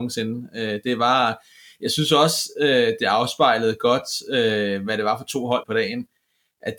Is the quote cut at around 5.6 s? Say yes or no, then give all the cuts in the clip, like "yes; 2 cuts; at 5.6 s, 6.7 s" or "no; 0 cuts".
yes; 1 cut; at 5.6 s